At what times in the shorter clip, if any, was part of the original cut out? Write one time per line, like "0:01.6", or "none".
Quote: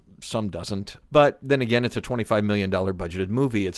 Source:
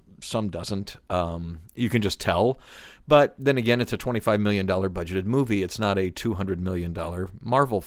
0:01.0